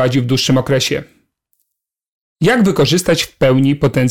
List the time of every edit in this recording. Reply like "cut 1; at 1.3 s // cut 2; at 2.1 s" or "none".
none

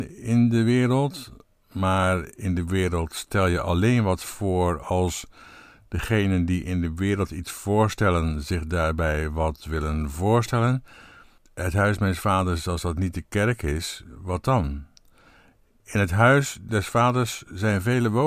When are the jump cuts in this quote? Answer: none

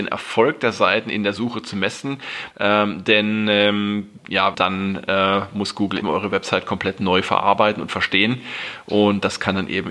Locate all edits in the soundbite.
cut 1; at 2.5 s // cut 2; at 4.5 s // cut 3; at 6.0 s

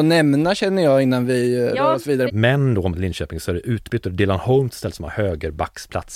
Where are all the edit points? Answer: cut 1; at 2.3 s

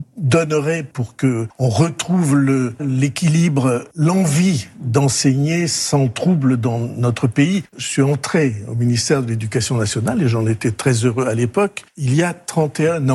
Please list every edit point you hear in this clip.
cut 1; at 2.8 s // cut 2; at 7.7 s

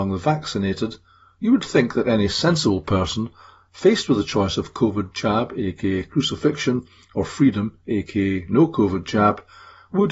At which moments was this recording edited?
none

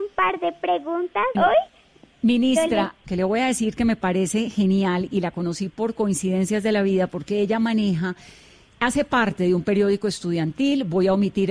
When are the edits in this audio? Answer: cut 1; at 1.3 s // cut 2; at 3.0 s

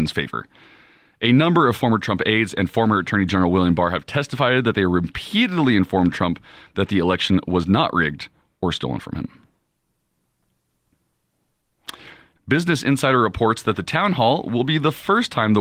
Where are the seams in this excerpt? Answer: cut 1; at 12.4 s

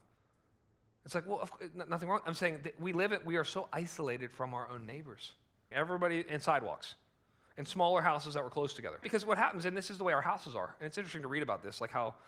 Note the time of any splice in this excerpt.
cut 1; at 5.7 s // cut 2; at 9.0 s

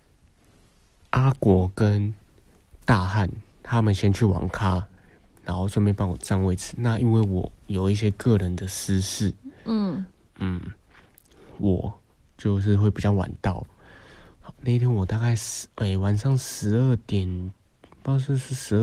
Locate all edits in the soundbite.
none

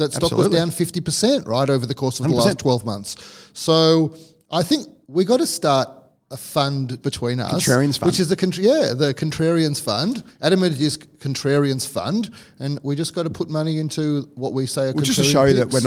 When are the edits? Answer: cut 1; at 7.0 s

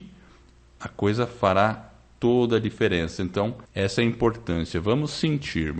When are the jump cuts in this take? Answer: cut 1; at 3.6 s

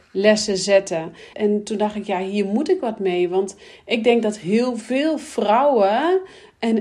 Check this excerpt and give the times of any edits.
cut 1; at 1.3 s

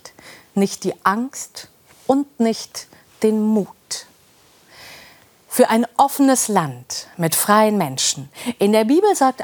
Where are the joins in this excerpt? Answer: none

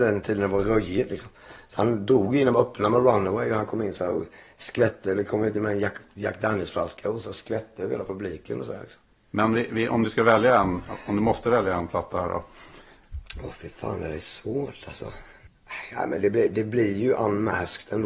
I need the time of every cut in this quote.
none

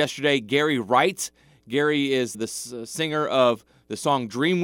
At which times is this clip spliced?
cut 1; at 2.3 s

